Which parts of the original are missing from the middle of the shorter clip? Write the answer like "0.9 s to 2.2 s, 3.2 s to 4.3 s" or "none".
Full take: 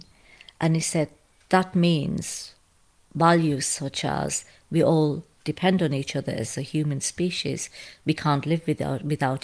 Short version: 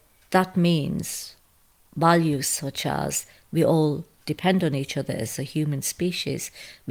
none